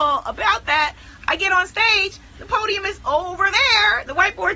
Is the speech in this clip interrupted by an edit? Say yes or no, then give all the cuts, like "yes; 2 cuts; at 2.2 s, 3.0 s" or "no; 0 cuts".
no; 0 cuts